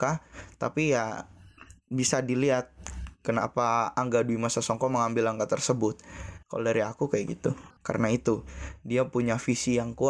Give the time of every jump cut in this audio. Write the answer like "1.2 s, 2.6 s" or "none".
6.4 s, 7.8 s